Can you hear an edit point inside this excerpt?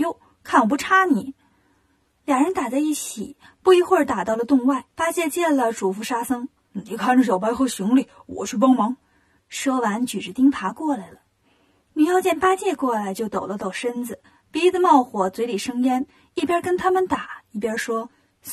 yes; 1 cut; at 4.9 s

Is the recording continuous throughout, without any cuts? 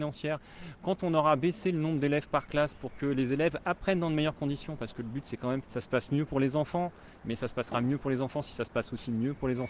no; 1 cut; at 5.6 s

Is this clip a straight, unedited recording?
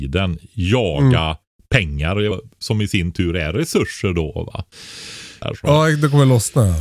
no; 2 cuts; at 2.3 s, 5.4 s

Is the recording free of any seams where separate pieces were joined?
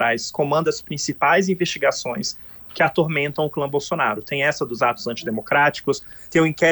yes; 0 cuts

